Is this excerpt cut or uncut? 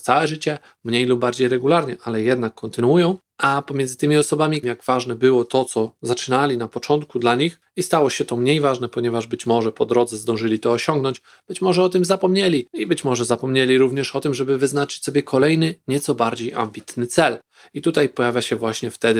cut